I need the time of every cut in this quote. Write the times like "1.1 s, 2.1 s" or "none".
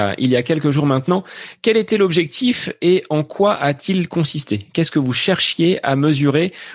none